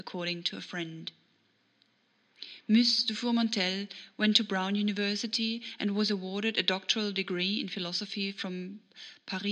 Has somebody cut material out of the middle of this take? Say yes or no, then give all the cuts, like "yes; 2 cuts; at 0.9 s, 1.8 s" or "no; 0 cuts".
no; 0 cuts